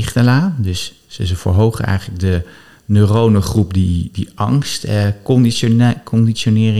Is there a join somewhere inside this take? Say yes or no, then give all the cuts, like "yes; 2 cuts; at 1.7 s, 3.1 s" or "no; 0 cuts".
no; 0 cuts